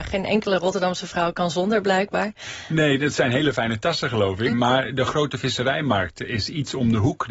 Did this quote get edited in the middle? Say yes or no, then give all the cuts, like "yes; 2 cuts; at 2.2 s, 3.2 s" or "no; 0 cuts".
yes; 1 cut; at 4.5 s